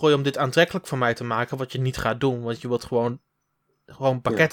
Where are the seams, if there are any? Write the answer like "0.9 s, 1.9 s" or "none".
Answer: none